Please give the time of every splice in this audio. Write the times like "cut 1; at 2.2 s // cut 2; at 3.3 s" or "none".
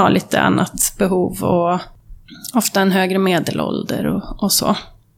none